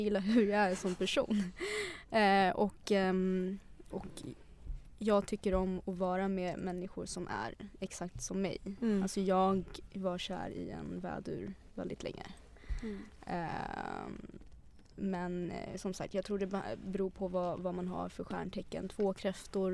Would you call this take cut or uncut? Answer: uncut